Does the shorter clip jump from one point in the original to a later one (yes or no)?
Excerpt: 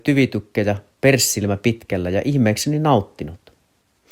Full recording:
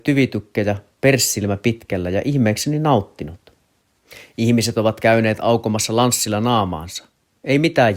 no